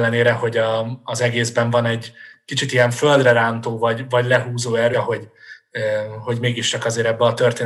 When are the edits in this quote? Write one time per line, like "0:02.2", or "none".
0:04.9

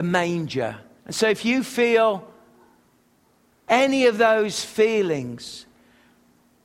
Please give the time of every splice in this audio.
0:01.0

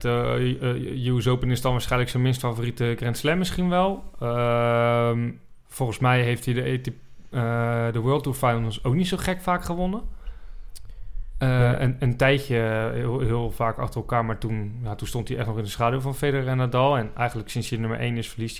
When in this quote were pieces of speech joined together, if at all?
none

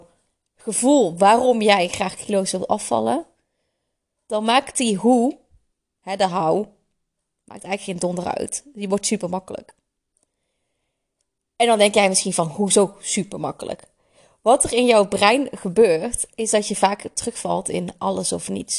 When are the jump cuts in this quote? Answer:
none

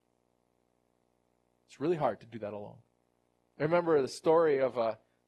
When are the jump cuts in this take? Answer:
none

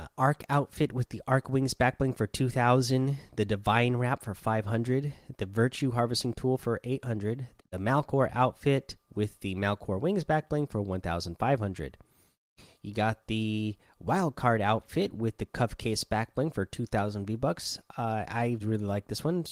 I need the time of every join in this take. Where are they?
0:07.6
0:18.6

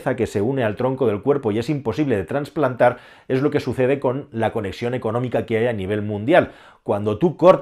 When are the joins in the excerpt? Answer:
none

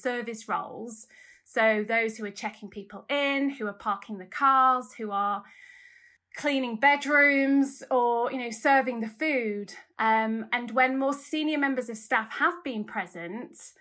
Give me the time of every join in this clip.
0:09.9

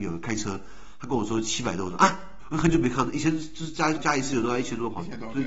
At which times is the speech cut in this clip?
0:02.4
0:04.0

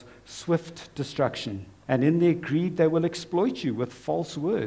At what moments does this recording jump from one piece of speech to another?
0:01.9

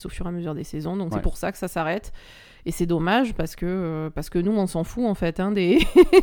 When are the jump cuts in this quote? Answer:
none

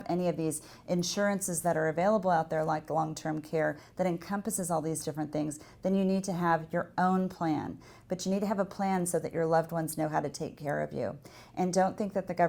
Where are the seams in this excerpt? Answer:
0:08.0

